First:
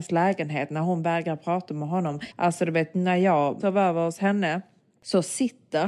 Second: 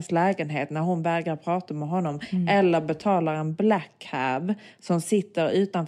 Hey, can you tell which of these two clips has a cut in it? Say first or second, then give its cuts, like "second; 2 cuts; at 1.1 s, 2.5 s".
first; 1 cut; at 2.3 s